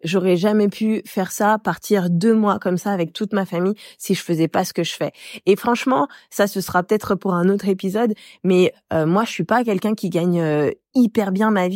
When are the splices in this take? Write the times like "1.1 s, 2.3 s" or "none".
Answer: none